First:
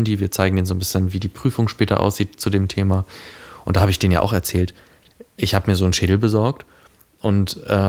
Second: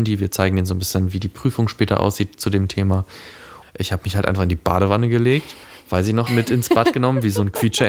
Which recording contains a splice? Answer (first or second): second